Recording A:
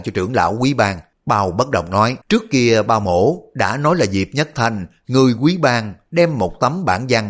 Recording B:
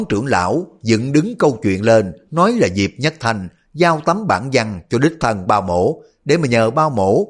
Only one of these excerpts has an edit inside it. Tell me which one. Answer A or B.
A